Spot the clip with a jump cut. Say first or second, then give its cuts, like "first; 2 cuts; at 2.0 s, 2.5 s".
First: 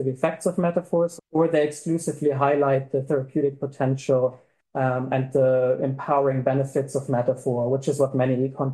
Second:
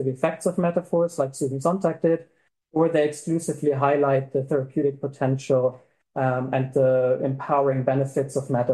first; 1 cut; at 1.2 s